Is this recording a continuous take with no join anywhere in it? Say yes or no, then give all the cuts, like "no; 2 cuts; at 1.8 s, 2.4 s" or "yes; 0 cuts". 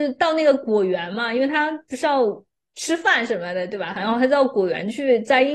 yes; 0 cuts